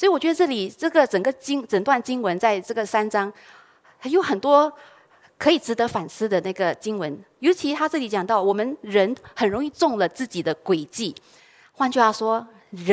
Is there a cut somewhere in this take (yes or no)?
no